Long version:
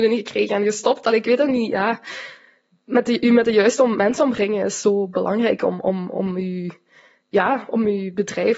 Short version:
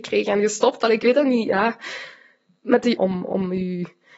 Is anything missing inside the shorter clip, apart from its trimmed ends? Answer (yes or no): yes